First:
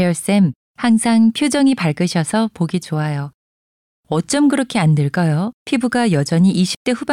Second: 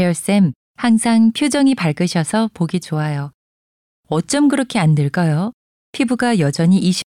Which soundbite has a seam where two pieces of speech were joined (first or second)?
first